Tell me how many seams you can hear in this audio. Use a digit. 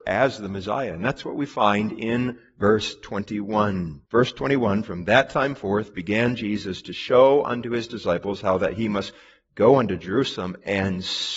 1